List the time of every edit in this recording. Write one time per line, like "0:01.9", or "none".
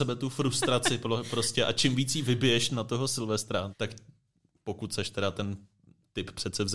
0:03.7